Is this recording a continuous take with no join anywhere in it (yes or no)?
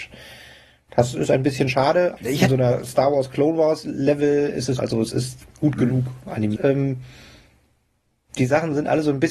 no